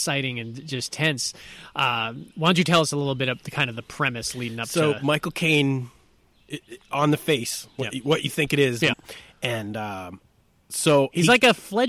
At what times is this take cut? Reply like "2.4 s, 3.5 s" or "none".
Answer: 8.9 s